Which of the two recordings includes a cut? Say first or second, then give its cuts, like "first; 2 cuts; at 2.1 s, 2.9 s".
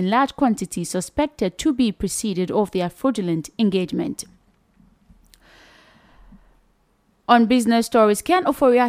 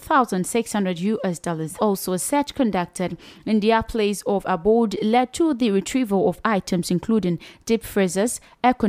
second; 1 cut; at 1.8 s